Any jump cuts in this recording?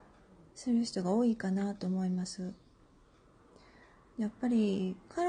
no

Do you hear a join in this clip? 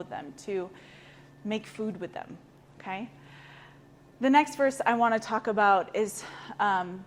no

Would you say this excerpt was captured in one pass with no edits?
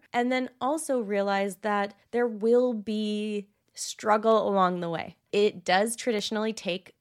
no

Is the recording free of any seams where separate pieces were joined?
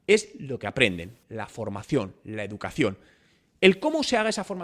yes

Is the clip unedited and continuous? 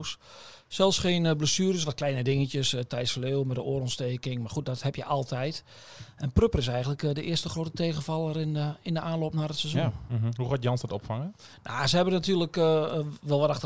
yes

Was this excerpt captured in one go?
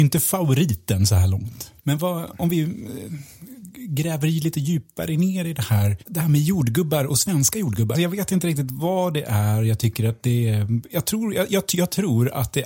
no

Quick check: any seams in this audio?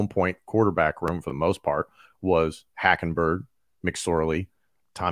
no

